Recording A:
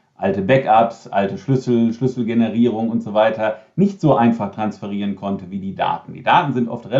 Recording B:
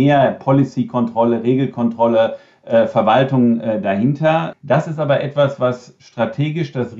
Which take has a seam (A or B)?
B